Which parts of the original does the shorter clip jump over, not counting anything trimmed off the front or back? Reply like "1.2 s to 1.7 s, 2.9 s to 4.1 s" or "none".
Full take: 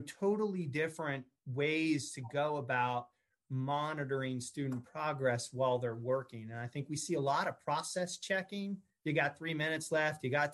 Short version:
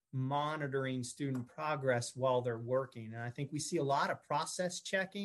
none